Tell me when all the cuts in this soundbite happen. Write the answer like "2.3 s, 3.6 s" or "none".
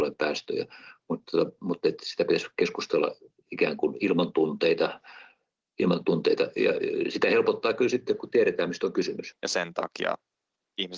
9.3 s